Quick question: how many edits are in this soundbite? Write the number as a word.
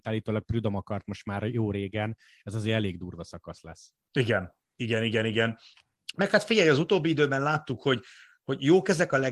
zero